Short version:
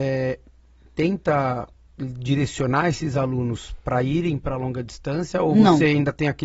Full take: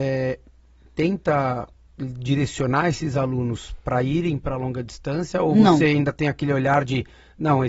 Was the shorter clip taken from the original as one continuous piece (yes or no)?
yes